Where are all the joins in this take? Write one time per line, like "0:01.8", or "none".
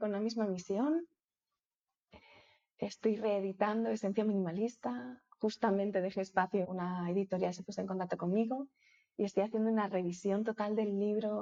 0:06.6